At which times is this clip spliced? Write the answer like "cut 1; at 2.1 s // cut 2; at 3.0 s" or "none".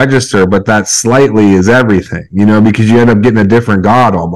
none